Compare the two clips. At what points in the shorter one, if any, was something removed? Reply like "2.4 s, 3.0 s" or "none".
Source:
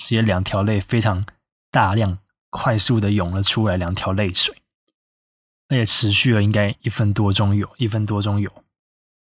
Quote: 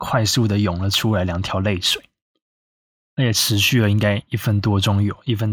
none